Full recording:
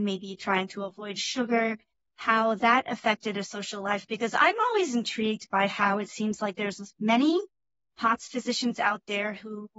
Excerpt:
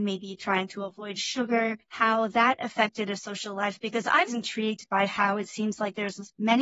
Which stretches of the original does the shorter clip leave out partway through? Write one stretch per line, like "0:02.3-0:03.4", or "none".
0:01.8-0:02.1
0:04.5-0:04.9